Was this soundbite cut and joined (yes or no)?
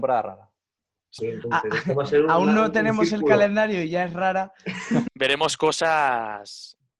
yes